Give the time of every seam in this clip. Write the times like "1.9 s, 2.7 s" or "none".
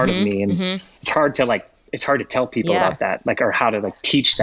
none